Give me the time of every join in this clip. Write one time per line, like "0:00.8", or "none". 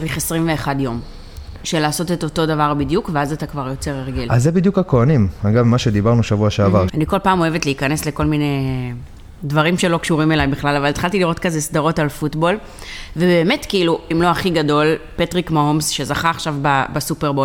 0:06.9
0:14.1